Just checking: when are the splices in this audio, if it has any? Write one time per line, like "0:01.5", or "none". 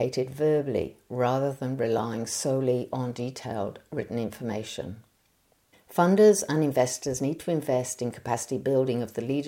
0:05.7